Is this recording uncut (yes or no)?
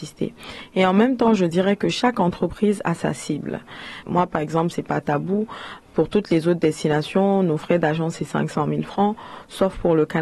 no